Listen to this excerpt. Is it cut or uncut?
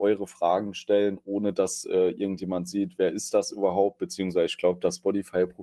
uncut